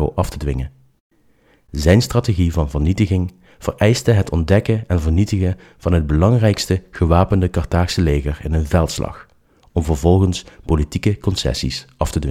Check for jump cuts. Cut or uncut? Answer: uncut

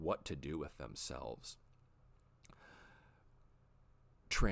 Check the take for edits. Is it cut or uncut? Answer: uncut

